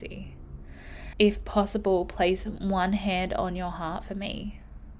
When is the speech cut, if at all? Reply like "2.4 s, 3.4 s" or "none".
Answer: 1.1 s